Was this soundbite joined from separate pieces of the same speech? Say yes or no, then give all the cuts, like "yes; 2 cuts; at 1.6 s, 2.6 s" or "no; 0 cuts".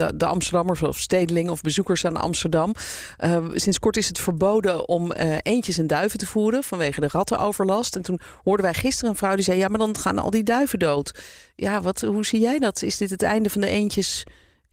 no; 0 cuts